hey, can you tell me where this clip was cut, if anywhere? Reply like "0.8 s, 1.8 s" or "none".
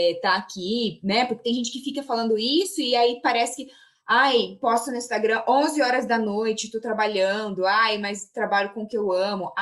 none